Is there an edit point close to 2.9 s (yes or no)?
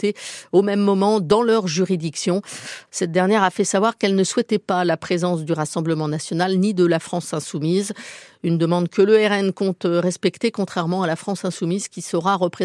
yes